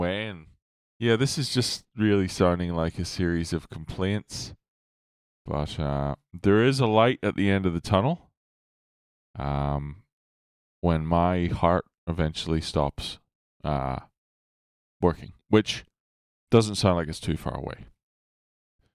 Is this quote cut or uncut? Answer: cut